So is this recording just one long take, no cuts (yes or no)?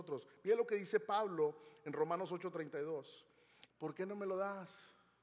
no